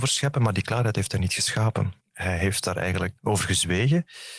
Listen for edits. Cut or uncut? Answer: cut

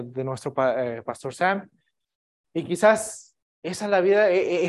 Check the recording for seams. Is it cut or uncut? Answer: cut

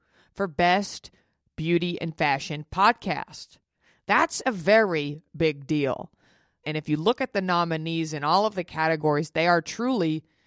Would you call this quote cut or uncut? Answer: cut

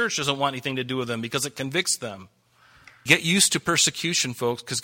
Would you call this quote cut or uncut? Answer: cut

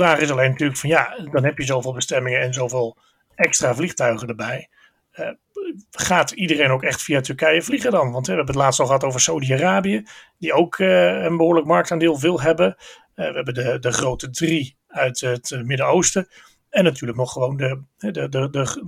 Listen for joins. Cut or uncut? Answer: uncut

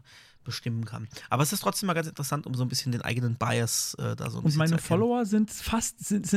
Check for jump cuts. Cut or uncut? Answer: uncut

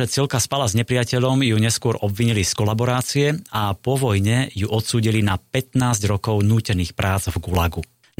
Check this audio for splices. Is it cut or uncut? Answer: uncut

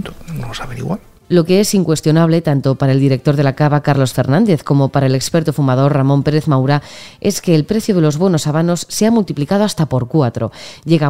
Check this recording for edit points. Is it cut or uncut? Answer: uncut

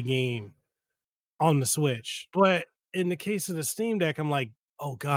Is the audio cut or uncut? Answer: cut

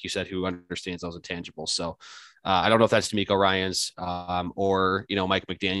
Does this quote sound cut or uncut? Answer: uncut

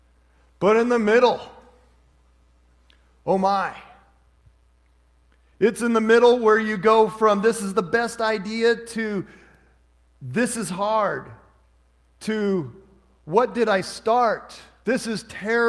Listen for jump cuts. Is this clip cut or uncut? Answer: uncut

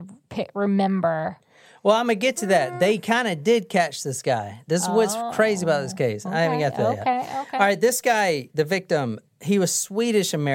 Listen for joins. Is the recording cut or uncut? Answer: cut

